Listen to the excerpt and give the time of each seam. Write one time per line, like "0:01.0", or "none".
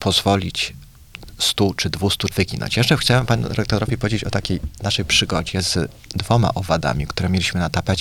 0:02.3
0:04.8